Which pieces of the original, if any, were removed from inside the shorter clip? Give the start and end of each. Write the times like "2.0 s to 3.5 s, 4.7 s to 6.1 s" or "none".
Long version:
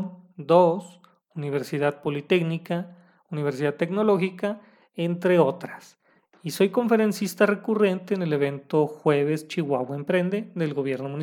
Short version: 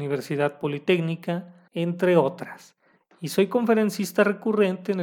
3.1 s to 4.9 s